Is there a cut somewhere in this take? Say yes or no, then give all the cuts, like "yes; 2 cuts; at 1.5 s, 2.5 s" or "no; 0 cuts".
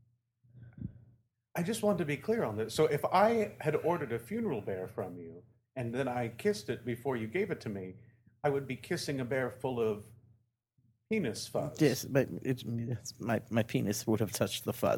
no; 0 cuts